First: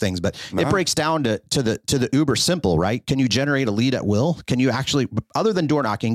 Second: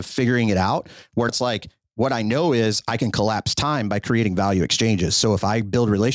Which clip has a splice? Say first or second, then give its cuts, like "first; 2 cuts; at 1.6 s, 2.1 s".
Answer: second; 1 cut; at 1.3 s